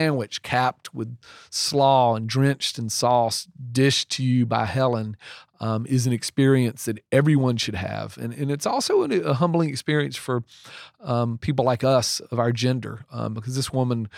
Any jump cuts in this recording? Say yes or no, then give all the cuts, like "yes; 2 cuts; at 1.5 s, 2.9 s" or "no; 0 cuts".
no; 0 cuts